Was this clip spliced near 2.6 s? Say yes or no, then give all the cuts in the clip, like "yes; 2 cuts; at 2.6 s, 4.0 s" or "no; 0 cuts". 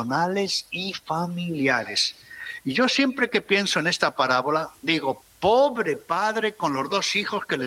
no; 1 cut; at 5.2 s